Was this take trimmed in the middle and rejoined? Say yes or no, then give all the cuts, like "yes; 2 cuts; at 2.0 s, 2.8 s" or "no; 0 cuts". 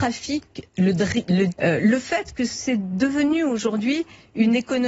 yes; 1 cut; at 1.5 s